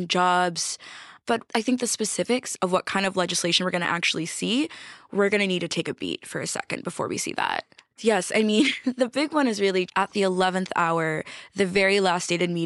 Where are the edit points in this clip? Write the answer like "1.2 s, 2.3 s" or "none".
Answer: 1.4 s, 7.9 s, 9.9 s